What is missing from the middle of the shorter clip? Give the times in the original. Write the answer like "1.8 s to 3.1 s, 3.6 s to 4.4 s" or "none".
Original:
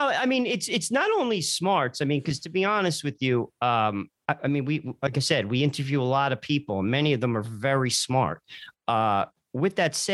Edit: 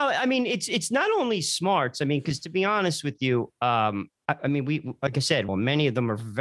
5.5 s to 6.7 s